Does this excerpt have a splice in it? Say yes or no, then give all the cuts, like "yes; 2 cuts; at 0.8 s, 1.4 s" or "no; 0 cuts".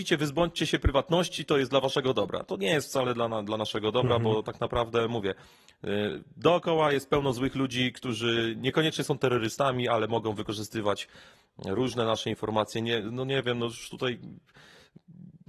no; 0 cuts